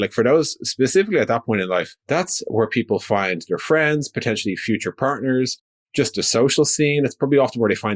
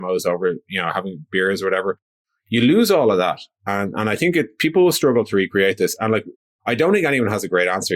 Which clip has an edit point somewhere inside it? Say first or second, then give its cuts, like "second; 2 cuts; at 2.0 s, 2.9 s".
first; 1 cut; at 2.0 s